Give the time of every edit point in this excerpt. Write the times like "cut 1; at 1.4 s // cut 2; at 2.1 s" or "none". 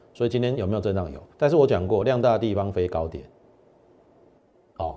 cut 1; at 1.3 s